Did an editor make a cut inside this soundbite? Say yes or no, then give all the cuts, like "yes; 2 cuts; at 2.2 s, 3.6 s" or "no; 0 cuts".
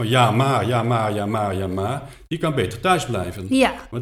no; 0 cuts